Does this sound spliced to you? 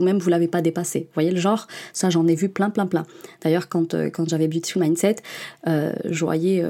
no; 0 cuts

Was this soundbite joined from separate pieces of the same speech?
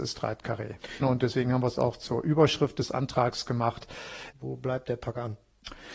yes; 2 cuts; at 1.0 s, 4.3 s

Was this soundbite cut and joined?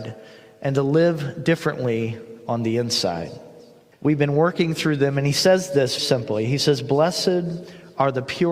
yes; 2 cuts; at 3.9 s, 6.0 s

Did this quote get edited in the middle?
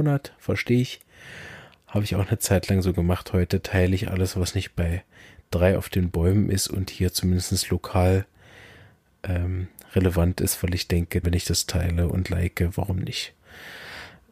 yes; 1 cut; at 11.2 s

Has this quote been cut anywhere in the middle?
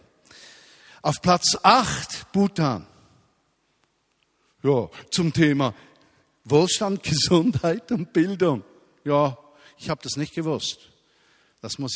no; 0 cuts

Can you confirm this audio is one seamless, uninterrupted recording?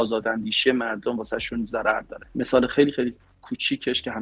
yes; 0 cuts

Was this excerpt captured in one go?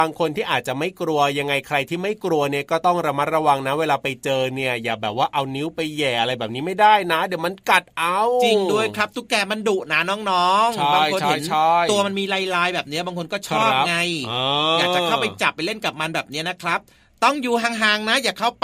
yes; 0 cuts

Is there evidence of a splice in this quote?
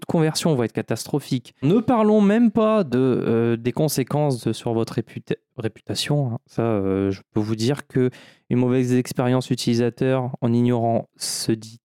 yes; 1 cut; at 1.6 s

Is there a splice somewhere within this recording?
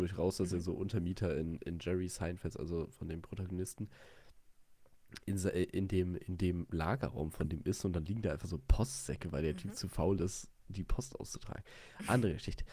no; 0 cuts

